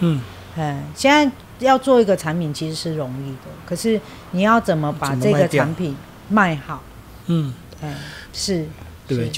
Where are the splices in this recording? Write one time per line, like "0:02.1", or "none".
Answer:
0:07.2
0:08.3